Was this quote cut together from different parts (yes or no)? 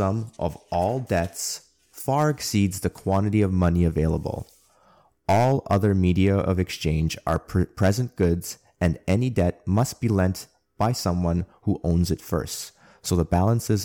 no